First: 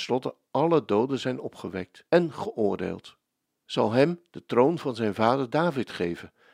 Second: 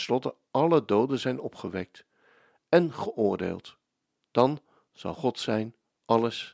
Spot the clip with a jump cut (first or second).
first